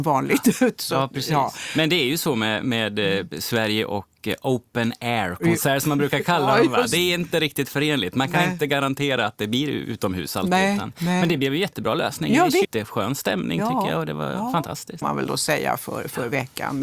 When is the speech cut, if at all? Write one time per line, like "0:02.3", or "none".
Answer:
0:12.6
0:15.0